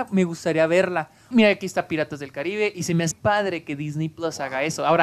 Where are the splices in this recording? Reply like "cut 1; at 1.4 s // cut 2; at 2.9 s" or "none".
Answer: cut 1; at 1.3 s // cut 2; at 3.1 s